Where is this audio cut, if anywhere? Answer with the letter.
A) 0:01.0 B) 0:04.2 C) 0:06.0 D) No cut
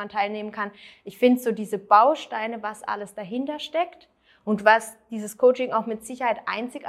D